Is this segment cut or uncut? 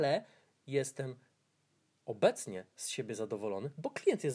uncut